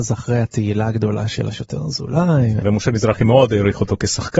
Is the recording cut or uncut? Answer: cut